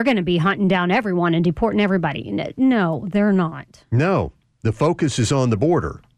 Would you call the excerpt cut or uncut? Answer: uncut